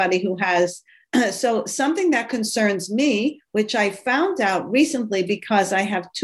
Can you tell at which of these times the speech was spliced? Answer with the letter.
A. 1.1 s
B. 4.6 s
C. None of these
A